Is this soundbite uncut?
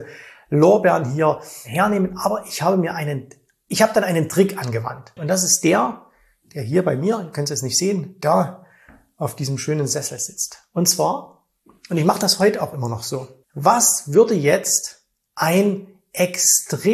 no; 2 cuts; at 5.2 s, 13.4 s

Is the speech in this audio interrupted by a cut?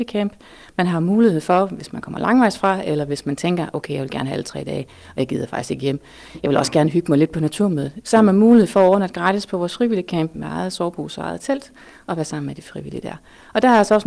yes; 1 cut; at 10.3 s

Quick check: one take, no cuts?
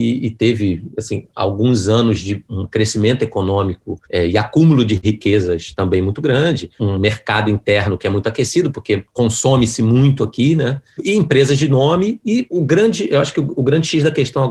yes; 0 cuts

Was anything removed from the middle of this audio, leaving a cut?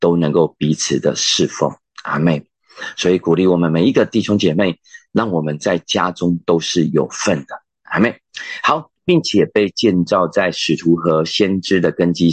yes; 2 cuts; at 7.8 s, 8.9 s

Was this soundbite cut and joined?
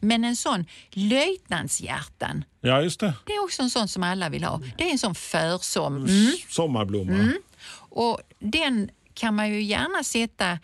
yes; 1 cut; at 6.0 s

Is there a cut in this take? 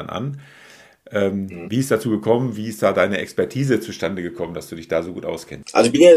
no; 0 cuts

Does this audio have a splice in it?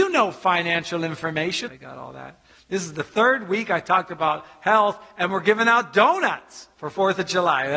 yes; 1 cut; at 1.7 s

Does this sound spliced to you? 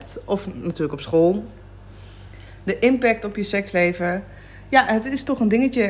no; 0 cuts

